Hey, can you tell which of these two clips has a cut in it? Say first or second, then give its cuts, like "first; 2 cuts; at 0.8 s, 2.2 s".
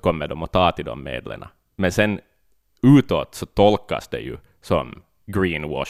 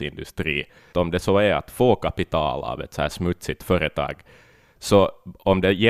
second; 1 cut; at 0.9 s